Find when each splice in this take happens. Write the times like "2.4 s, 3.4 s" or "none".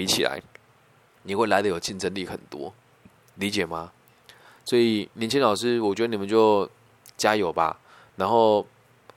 none